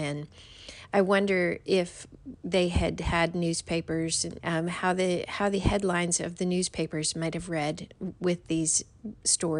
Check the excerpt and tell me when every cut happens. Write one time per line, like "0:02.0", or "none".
0:02.4
0:04.4

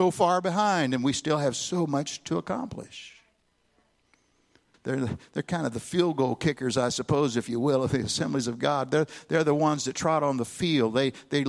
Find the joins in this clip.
0:04.7

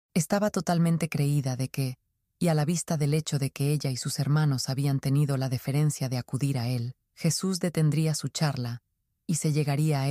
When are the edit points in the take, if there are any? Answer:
0:02.2
0:07.1

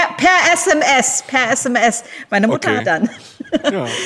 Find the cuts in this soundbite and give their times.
0:02.8

